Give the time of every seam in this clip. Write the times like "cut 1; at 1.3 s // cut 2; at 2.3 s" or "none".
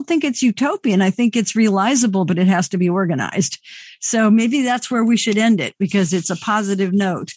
none